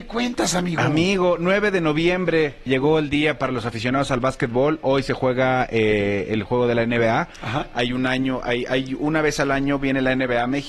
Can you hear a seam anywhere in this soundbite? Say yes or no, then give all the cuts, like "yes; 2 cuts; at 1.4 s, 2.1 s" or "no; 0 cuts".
yes; 1 cut; at 2.7 s